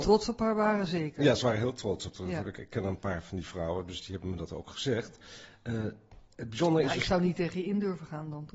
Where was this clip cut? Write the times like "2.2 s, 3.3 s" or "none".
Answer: none